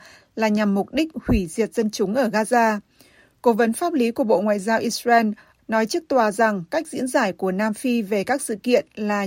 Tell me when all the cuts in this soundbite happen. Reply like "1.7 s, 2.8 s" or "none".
5.6 s